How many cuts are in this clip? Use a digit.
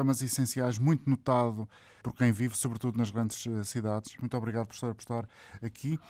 2